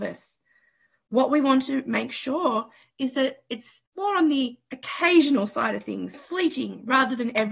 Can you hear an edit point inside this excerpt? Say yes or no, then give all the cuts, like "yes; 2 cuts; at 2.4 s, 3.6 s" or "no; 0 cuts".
yes; 2 cuts; at 3.9 s, 6.1 s